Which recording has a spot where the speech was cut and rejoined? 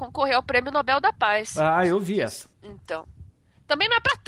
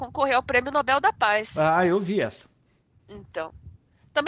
first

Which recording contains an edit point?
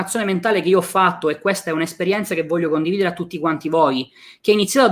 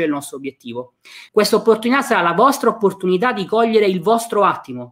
second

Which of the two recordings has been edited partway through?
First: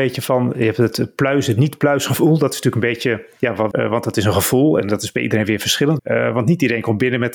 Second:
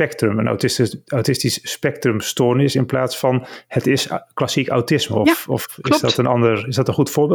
first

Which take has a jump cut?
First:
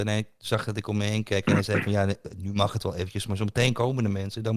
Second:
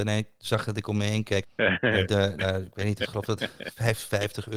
second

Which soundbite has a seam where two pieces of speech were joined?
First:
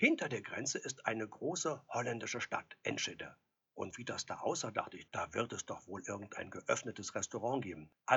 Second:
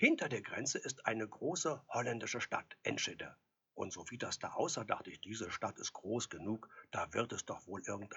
first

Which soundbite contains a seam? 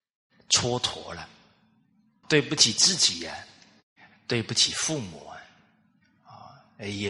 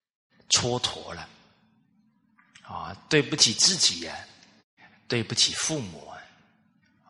first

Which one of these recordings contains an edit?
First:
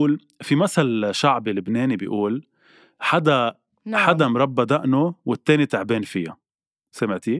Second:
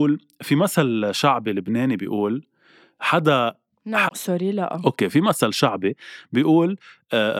second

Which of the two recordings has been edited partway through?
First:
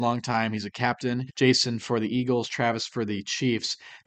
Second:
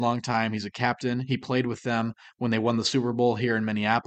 first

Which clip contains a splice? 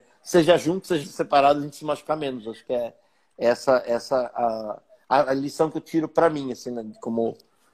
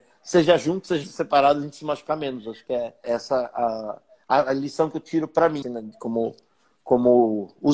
second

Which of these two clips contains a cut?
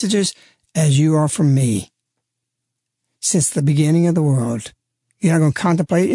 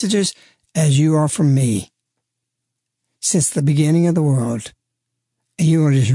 first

